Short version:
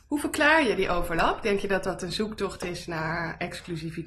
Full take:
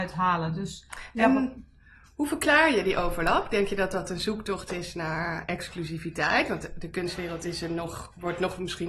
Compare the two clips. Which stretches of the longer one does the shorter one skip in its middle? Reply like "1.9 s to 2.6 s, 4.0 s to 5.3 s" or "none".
none